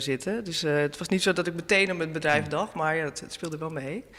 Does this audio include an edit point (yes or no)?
no